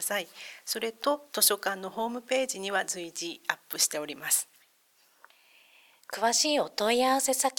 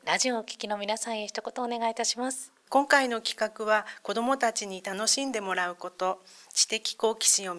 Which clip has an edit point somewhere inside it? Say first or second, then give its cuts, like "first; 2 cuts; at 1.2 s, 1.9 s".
second; 1 cut; at 2.7 s